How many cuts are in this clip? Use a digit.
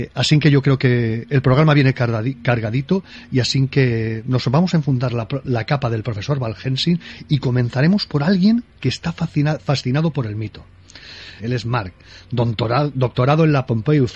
1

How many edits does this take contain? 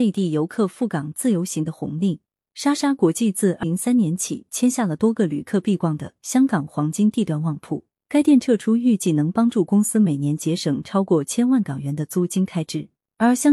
2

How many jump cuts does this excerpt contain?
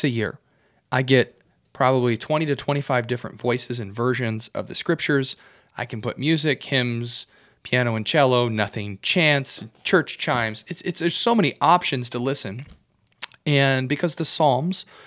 0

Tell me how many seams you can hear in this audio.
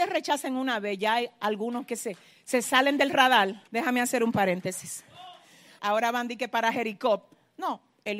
2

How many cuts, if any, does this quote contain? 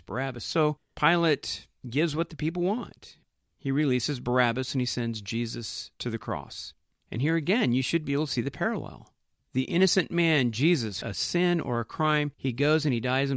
1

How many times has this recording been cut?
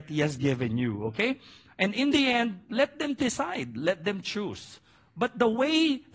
0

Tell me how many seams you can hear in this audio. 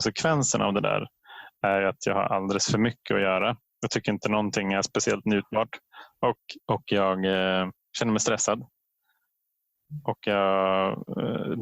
1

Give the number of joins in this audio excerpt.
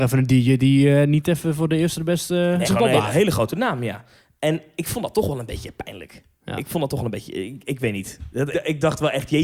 2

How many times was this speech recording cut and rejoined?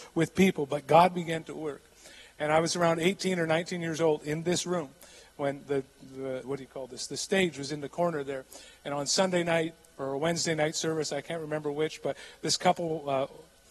1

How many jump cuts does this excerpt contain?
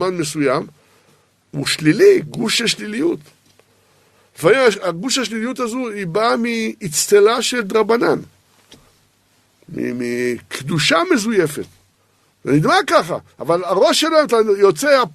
0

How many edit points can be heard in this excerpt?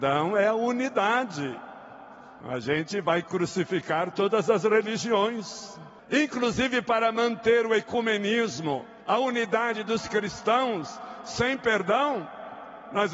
3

